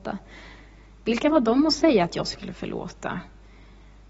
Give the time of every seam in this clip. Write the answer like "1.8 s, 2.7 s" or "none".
1.0 s